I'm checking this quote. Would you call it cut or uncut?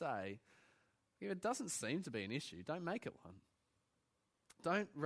uncut